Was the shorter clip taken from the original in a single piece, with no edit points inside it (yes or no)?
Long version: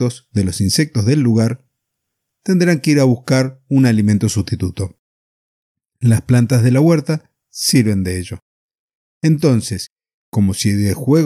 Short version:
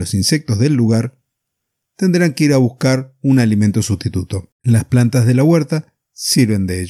no